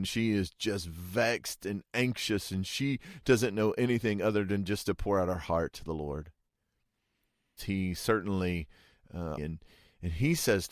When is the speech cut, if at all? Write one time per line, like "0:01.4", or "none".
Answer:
0:07.6
0:09.4